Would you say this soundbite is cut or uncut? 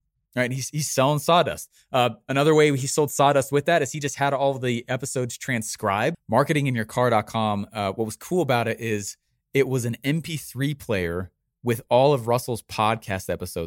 cut